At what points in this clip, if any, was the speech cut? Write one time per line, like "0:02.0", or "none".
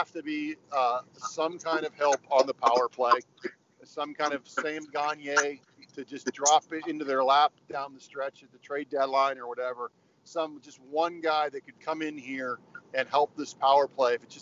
0:11.8